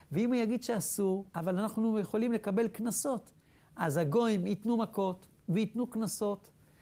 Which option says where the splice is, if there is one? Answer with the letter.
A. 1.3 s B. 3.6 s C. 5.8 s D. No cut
A